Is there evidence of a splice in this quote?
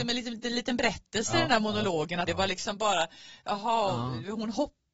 yes; 1 cut; at 2.3 s

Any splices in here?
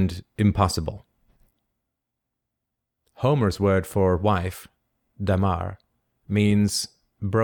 no; 0 cuts

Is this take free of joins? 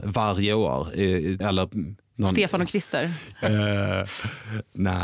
no; 2 cuts; at 1.4 s, 3.3 s

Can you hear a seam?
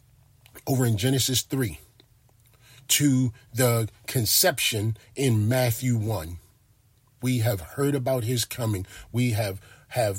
yes; 1 cut; at 7.2 s

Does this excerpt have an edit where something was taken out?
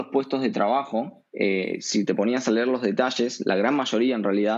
yes; 1 cut; at 1.3 s

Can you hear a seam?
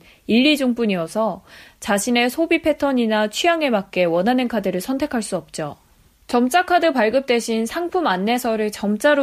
yes; 1 cut; at 6.1 s

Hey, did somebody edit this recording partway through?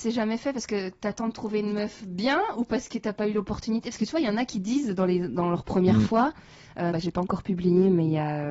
yes; 1 cut; at 6.9 s

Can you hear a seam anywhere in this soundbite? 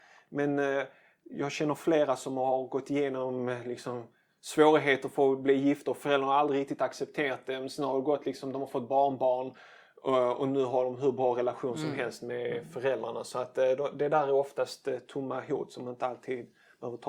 no; 0 cuts

